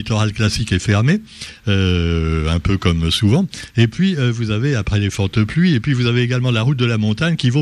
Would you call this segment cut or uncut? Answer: uncut